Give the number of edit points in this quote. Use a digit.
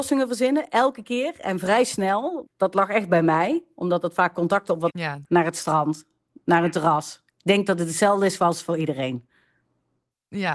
2